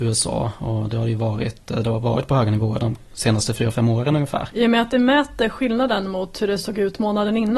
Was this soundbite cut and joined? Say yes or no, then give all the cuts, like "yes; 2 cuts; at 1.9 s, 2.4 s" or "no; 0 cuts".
yes; 1 cut; at 4.5 s